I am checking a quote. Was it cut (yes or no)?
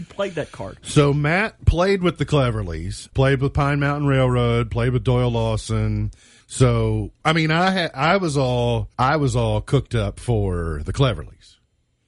yes